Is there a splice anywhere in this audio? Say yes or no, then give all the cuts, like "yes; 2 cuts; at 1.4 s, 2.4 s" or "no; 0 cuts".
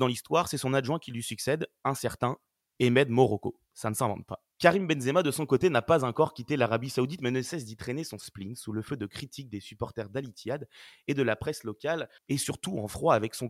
yes; 2 cuts; at 4.5 s, 12.2 s